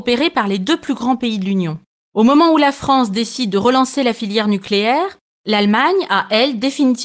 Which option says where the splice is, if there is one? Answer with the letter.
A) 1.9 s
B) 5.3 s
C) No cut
C